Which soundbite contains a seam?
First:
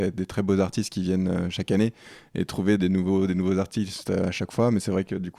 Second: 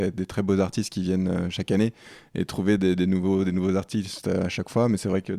first; 1 cut; at 2.8 s

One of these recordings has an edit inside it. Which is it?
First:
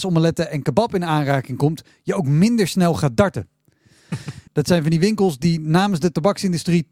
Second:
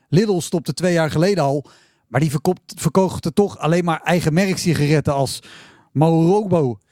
first; 1 cut; at 4.5 s

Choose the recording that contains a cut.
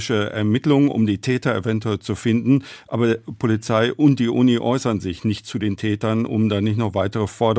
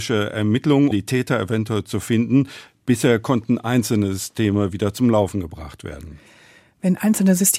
second; 2 cuts; at 0.9 s, 2.7 s

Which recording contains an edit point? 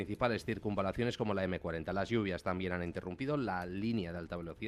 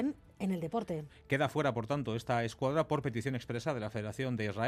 second; 1 cut; at 1.1 s

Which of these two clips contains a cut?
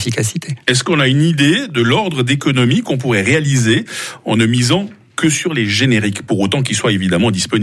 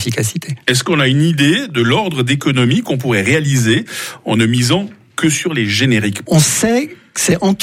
second; 1 cut; at 6.2 s

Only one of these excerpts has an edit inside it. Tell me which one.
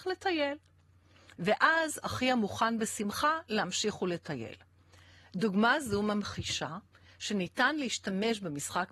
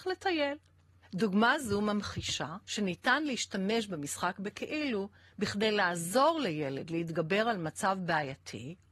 second; 2 cuts; at 1.0 s, 2.6 s

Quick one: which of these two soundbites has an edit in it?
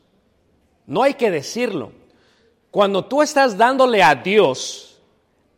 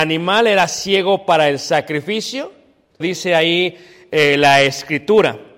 second; 1 cut; at 3.0 s

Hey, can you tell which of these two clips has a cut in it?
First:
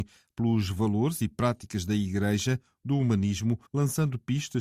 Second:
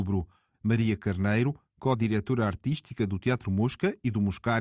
first; 1 cut; at 3.7 s

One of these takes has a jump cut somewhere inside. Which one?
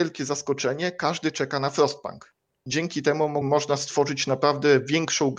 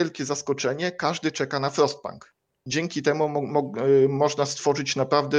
first; 1 cut; at 3.4 s

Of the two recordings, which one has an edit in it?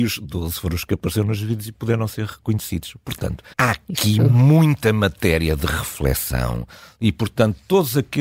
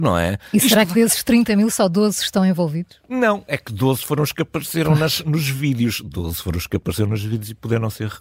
first; 1 cut; at 3.5 s

